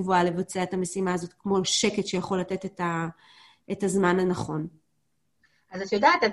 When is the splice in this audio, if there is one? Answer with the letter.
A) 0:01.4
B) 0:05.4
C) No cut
C